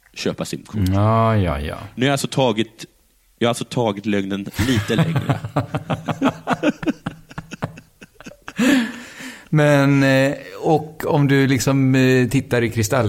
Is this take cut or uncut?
uncut